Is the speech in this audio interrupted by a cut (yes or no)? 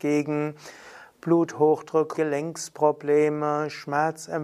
yes